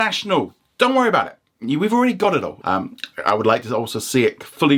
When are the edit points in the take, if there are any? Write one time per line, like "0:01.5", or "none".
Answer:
0:02.6

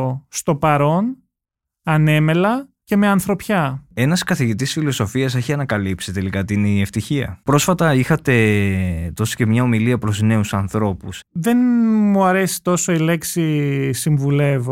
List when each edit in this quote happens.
0:07.4
0:11.2

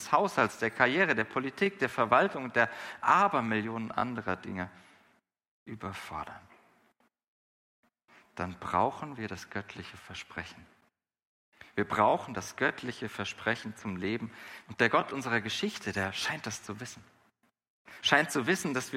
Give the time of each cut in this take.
0:11.7
0:14.7

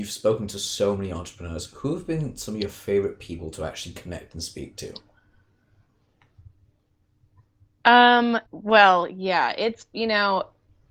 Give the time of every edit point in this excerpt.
0:08.5

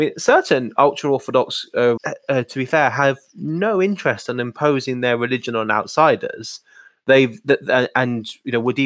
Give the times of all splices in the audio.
0:02.0

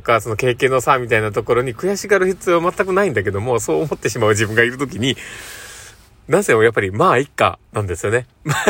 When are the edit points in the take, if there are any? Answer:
none

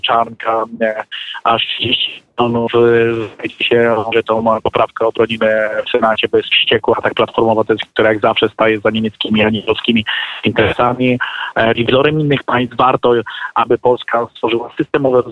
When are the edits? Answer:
0:02.7
0:04.1
0:11.7

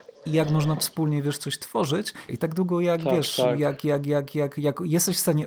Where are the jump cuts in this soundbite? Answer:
0:02.3

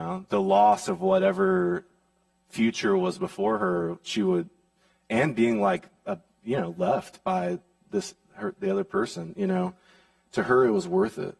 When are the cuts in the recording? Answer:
none

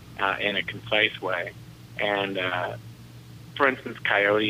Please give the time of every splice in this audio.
none

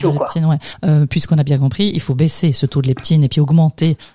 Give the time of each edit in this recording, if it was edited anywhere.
none

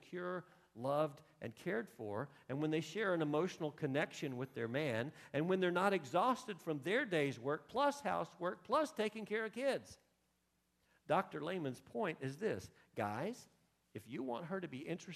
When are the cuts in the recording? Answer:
none

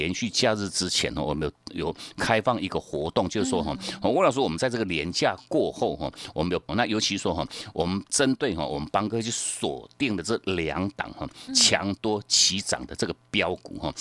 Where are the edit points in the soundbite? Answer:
0:06.7

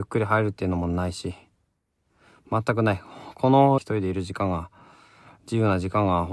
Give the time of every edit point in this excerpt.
0:03.8

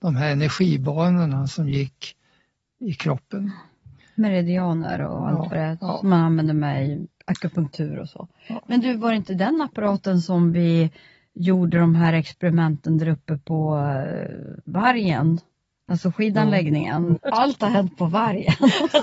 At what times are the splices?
0:17.2

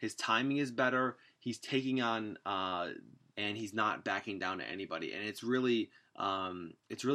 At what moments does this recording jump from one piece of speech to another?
0:03.3

